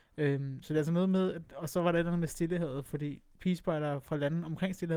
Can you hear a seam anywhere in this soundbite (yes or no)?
no